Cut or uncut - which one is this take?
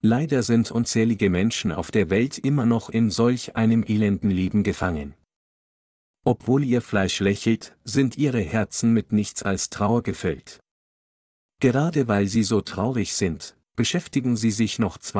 uncut